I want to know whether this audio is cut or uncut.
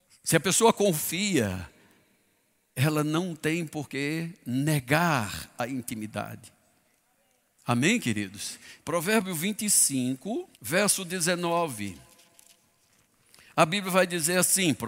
cut